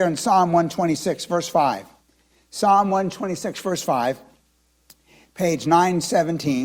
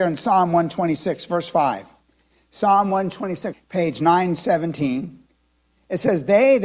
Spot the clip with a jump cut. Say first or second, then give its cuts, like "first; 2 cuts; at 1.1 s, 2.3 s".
second; 1 cut; at 3.5 s